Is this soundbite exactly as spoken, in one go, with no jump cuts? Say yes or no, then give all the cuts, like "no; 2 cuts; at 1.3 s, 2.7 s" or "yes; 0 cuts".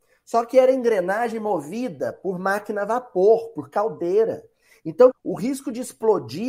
no; 1 cut; at 5.1 s